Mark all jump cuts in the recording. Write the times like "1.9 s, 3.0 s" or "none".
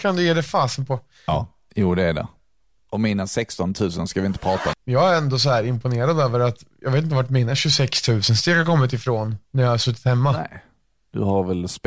1.3 s, 4.7 s, 9.4 s

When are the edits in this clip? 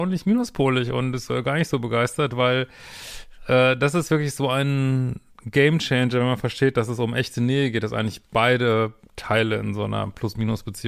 none

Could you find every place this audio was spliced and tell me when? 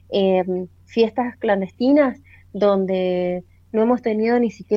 none

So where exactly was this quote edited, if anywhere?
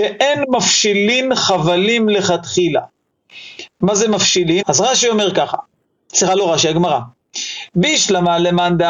4.6 s

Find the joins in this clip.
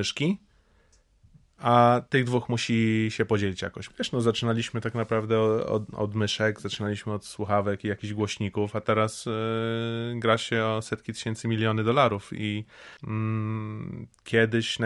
3.9 s, 13.0 s

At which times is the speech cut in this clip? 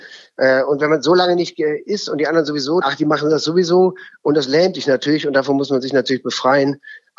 2.8 s

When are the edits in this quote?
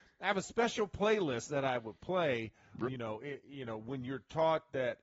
2.8 s

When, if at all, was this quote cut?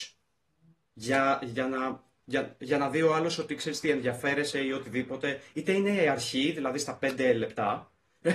none

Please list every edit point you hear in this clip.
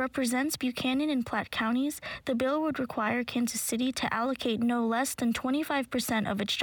none

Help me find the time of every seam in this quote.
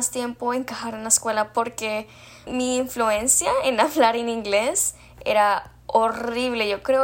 2.5 s

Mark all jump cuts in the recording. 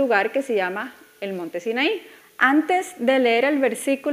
2.2 s

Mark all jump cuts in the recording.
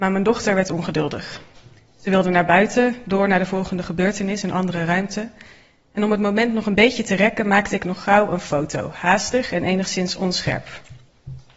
none

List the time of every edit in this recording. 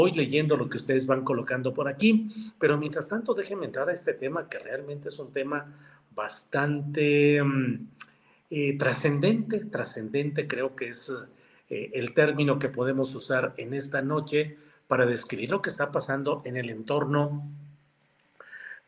none

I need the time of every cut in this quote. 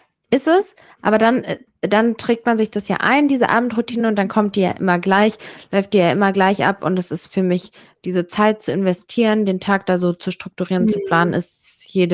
none

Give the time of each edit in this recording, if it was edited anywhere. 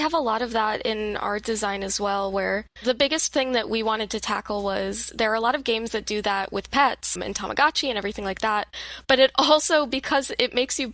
7.2 s

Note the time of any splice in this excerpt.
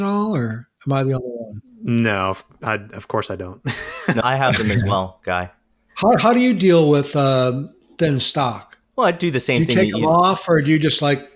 4.2 s

